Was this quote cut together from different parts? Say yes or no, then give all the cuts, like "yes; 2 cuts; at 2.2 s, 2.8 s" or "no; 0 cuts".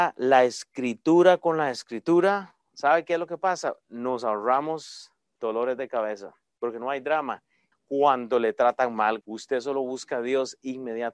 yes; 2 cuts; at 7.7 s, 9.2 s